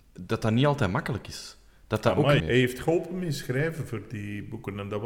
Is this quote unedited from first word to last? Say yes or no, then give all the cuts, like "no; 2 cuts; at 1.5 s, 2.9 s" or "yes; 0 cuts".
no; 1 cut; at 2.4 s